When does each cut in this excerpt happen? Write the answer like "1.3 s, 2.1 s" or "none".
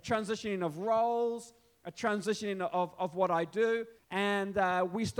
4.0 s